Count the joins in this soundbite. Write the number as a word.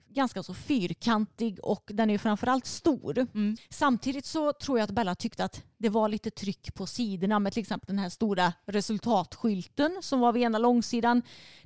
one